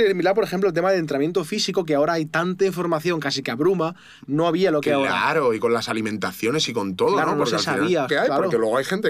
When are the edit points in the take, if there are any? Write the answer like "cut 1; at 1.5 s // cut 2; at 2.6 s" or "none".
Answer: cut 1; at 4.2 s // cut 2; at 8.1 s